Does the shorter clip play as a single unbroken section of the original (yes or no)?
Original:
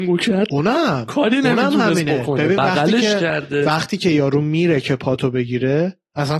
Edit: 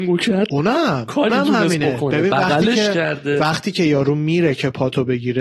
no